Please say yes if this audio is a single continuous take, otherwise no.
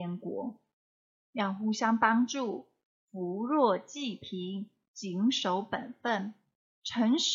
yes